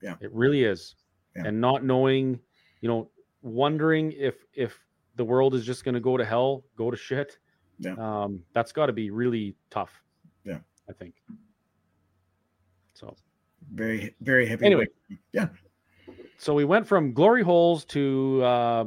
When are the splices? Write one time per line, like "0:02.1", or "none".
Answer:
0:08.5